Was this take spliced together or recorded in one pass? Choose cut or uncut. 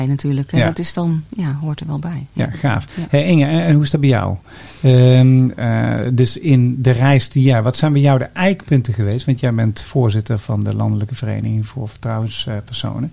uncut